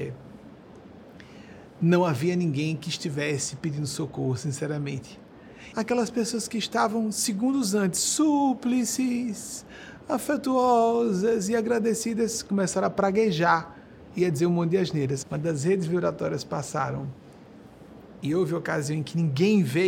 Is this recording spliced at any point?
yes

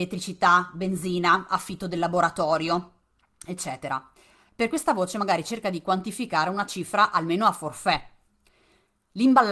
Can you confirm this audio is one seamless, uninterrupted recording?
yes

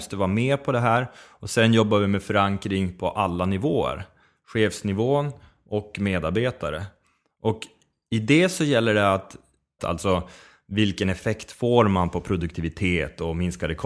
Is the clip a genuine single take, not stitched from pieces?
no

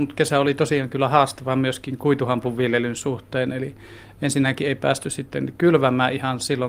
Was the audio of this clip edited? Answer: no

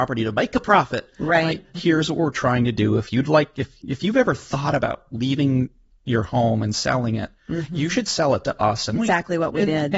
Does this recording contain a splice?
yes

